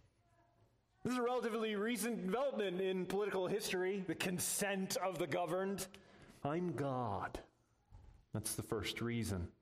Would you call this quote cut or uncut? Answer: cut